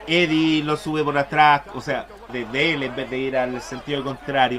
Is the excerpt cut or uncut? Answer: cut